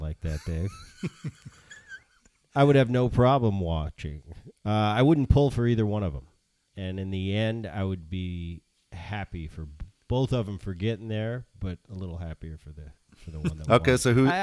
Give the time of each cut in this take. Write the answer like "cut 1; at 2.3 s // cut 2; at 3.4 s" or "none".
none